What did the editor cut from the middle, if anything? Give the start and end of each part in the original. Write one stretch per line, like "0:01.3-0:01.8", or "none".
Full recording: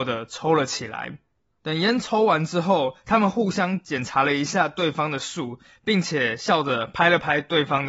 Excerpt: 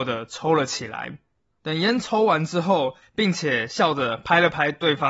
0:03.0-0:05.7